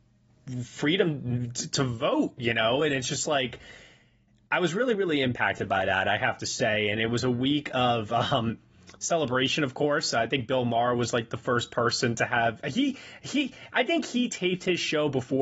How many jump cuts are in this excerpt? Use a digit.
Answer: 0